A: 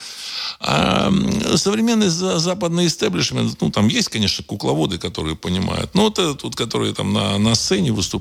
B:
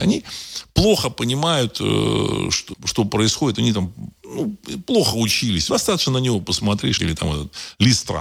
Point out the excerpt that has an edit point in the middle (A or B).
B